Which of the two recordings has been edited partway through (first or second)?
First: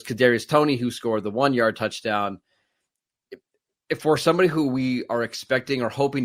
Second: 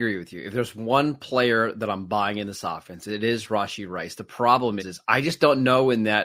second